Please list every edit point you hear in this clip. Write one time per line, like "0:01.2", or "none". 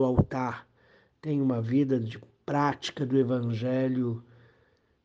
0:01.1

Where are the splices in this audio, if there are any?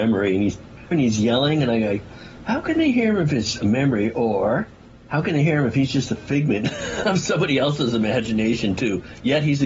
0:00.9

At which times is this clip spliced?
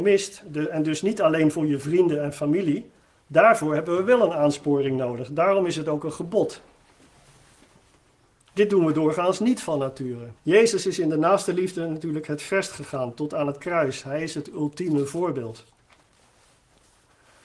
0:10.4

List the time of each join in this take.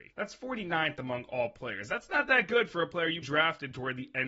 0:03.2

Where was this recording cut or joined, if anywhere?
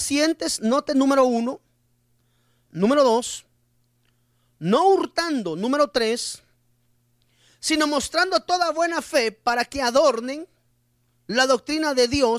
0:02.7

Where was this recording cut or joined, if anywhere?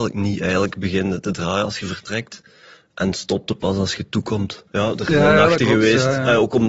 0:04.7

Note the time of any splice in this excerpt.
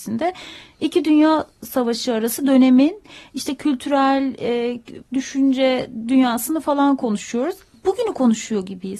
0:05.0

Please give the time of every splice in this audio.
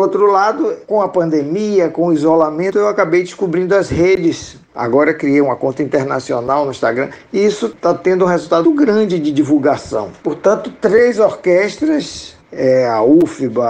0:08.6
0:10.2

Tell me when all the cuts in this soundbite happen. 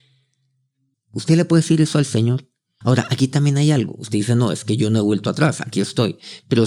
0:00.9
0:02.8

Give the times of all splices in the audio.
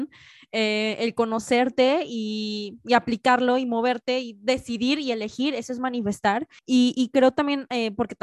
0:06.6

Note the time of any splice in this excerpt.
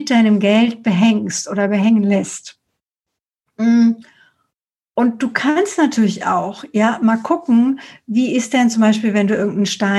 none

